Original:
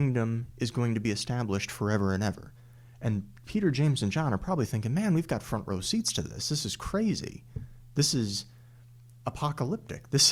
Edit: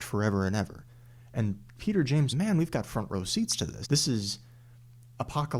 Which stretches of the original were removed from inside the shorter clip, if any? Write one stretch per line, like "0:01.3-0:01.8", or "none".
0:04.0-0:04.9
0:06.4-0:07.9